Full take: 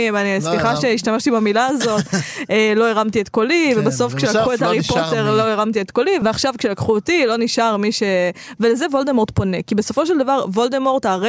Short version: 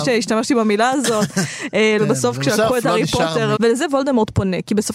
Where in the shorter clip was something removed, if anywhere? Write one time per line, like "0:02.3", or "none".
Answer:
0:02.0
0:03.6